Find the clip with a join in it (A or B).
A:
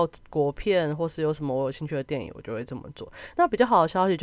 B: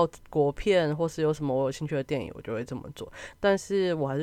B